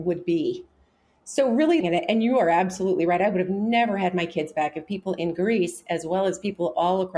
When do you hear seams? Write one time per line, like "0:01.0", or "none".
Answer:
0:01.8